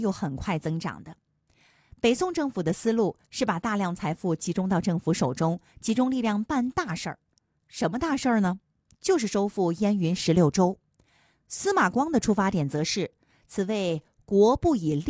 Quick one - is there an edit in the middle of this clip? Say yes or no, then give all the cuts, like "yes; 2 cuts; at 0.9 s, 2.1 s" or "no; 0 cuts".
no; 0 cuts